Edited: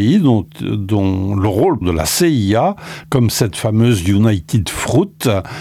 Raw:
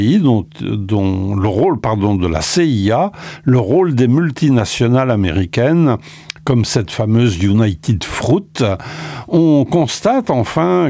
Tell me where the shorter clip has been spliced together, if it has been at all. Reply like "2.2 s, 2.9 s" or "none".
1.8 s, 3.0 s